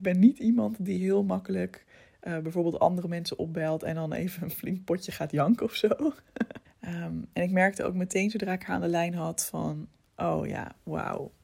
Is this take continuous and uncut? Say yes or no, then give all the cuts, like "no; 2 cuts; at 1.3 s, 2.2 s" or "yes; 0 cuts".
no; 1 cut; at 6.6 s